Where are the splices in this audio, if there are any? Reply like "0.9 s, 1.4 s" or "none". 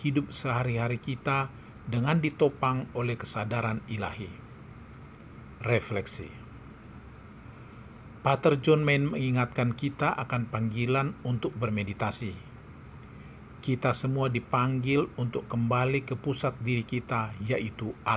5.6 s

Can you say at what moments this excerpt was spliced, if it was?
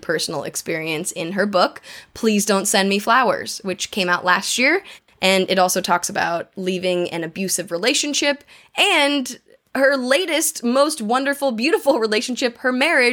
5.1 s

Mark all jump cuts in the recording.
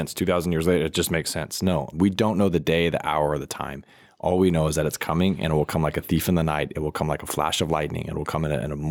1.9 s

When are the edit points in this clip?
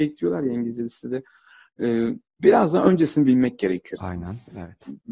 4.0 s

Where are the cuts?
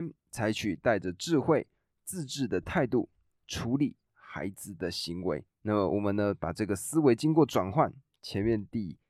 5.5 s

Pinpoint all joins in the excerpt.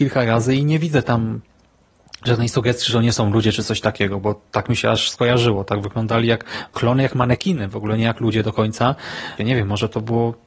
9.4 s

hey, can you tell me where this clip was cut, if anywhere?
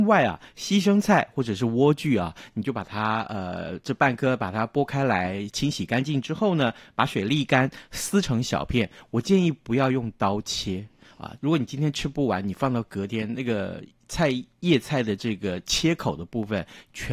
11.4 s

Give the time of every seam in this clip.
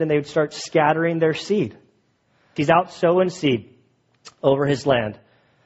2.6 s

